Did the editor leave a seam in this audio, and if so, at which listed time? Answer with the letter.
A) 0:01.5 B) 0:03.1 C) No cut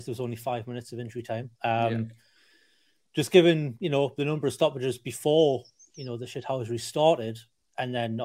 A